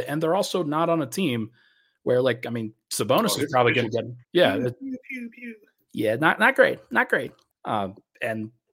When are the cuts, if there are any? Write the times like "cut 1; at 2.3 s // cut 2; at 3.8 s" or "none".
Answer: cut 1; at 4.2 s // cut 2; at 7.5 s